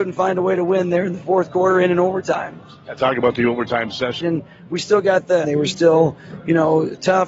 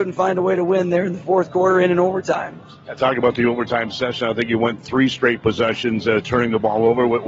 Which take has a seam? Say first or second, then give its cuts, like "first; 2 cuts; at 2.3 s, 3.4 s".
first; 2 cuts; at 4.2 s, 5.4 s